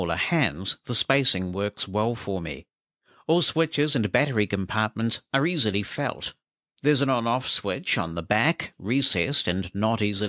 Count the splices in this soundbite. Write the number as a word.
zero